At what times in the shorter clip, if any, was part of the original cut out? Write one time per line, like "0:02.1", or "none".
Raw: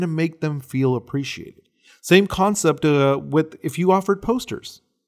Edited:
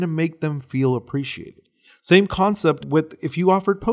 0:02.8